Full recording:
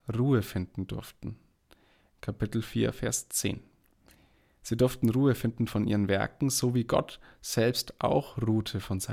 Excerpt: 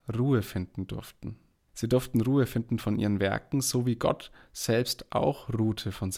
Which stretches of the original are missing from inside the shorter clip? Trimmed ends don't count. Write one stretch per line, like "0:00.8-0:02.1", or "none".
0:01.7-0:04.6